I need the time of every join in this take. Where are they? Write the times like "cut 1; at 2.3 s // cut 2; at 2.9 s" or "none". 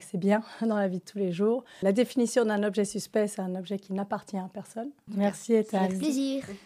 cut 1; at 1.8 s // cut 2; at 5.1 s